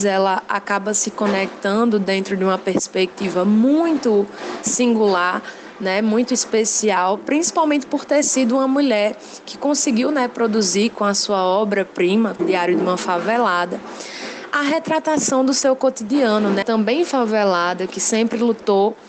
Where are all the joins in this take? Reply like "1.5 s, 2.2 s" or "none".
12.4 s, 16.6 s